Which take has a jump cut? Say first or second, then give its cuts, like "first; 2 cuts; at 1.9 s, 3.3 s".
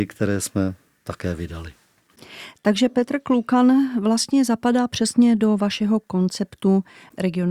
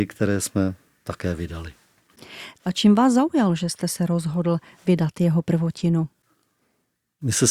second; 1 cut; at 2.6 s